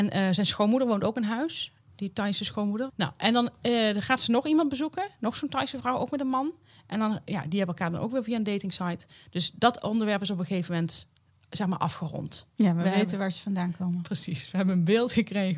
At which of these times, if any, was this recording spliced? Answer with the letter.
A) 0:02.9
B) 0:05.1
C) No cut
A